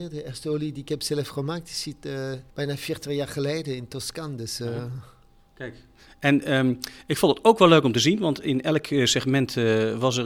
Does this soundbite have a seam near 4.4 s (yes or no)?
no